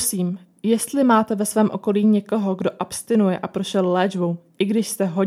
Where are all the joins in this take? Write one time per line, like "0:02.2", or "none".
none